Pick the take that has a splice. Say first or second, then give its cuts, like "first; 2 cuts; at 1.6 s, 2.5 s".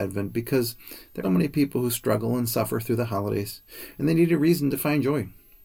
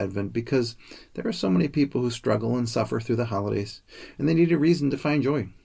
first; 1 cut; at 1.2 s